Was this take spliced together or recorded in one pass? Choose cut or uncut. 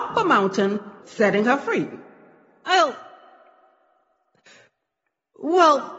cut